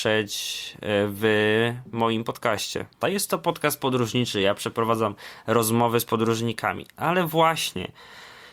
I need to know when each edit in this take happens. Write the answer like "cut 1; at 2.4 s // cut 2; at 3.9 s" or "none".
cut 1; at 3.0 s